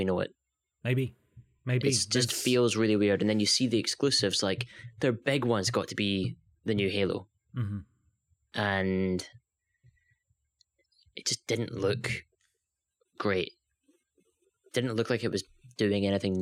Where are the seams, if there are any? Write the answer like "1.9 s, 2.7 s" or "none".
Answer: none